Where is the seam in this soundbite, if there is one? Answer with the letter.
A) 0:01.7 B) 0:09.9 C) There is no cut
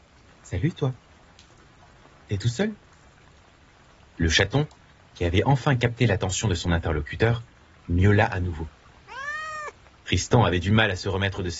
B